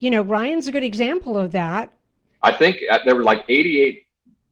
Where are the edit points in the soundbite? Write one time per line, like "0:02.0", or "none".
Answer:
0:02.3